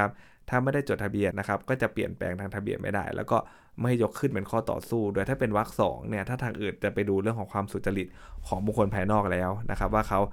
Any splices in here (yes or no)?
yes